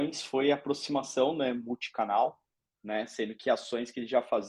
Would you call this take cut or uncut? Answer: cut